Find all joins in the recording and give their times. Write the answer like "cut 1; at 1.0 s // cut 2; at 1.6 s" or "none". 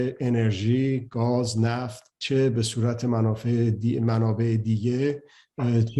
cut 1; at 2.1 s